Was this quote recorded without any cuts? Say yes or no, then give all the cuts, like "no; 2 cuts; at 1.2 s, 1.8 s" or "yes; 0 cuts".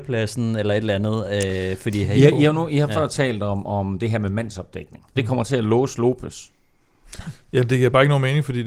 no; 1 cut; at 5.2 s